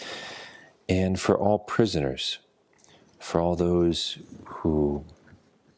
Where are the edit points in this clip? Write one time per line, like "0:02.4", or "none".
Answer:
none